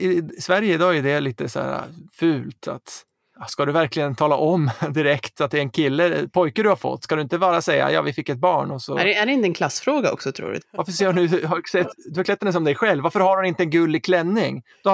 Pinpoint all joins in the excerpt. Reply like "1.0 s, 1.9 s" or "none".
10.6 s